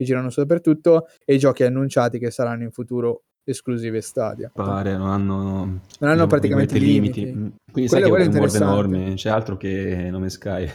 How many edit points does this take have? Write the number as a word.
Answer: two